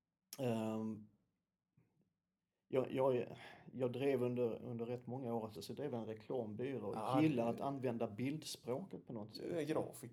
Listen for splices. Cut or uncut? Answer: cut